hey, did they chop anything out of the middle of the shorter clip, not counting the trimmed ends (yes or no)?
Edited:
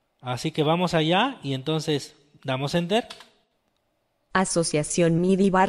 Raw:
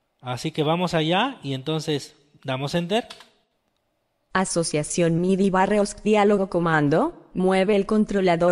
no